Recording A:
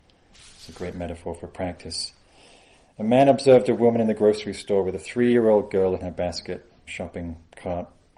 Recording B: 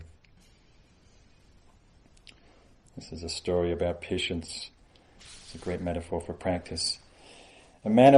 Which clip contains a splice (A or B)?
A